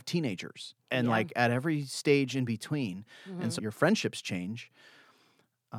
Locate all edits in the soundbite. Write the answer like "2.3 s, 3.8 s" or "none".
3.6 s